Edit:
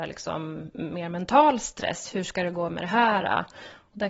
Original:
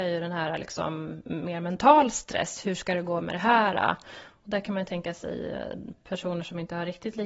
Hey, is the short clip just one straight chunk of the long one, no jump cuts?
yes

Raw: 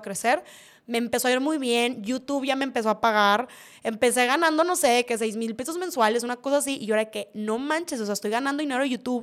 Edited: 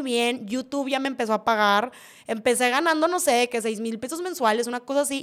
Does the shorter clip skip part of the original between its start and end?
no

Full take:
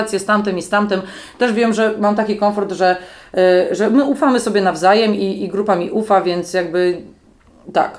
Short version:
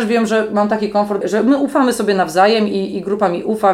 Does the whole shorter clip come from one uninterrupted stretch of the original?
no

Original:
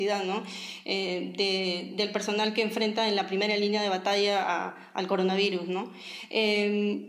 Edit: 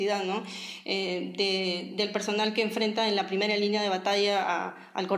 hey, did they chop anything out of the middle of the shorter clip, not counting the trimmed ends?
no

